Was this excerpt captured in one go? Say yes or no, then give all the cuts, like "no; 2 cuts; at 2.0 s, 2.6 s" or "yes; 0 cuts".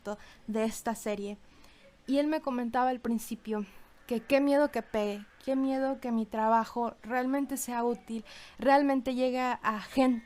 yes; 0 cuts